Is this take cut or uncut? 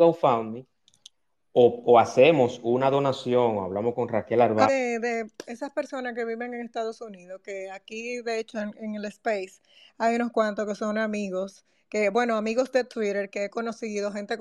cut